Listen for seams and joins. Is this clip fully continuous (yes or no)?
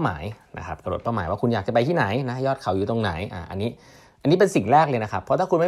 yes